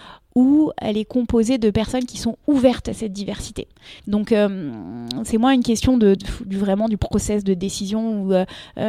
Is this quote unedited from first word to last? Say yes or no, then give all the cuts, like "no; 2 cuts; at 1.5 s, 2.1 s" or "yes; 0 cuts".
no; 2 cuts; at 4.0 s, 6.2 s